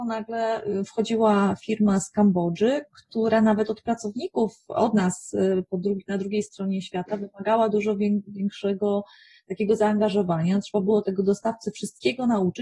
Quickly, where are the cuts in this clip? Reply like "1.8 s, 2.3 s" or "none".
none